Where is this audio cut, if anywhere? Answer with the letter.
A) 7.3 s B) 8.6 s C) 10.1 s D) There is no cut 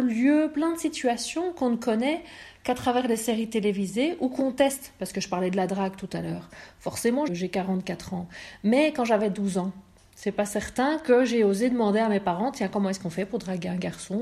A